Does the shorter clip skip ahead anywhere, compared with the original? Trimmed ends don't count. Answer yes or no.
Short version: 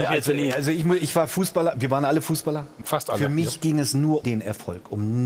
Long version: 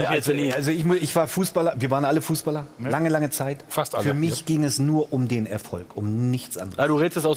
yes